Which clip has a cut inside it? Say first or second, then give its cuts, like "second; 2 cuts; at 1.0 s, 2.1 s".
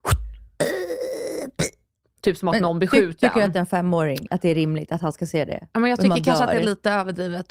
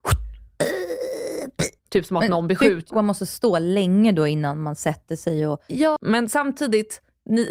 second; 3 cuts; at 1.8 s, 2.9 s, 6.0 s